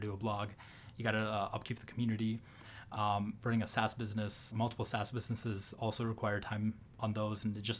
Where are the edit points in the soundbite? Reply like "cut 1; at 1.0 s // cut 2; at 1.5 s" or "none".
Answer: cut 1; at 3.4 s // cut 2; at 4.5 s